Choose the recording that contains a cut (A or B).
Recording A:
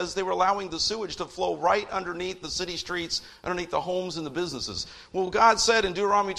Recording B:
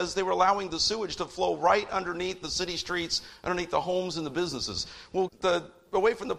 B